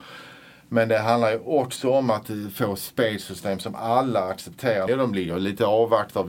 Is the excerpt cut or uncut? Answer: cut